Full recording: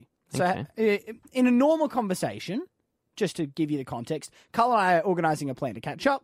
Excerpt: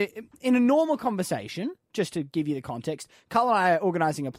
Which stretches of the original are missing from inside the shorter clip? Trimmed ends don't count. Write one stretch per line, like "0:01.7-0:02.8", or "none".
0:02.7-0:03.1